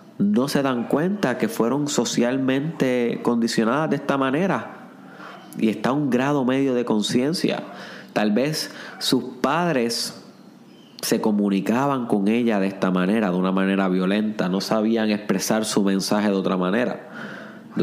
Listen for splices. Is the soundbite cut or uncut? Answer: uncut